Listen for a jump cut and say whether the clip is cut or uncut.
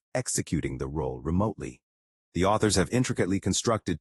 cut